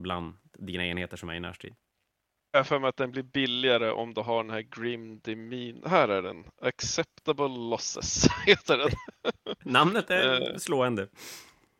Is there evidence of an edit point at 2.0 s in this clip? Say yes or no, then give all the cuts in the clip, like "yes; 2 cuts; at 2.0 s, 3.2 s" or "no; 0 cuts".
no; 0 cuts